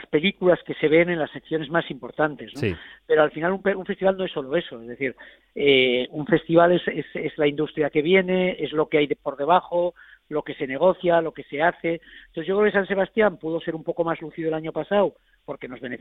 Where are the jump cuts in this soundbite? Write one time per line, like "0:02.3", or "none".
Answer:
none

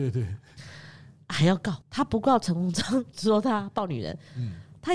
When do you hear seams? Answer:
0:01.8

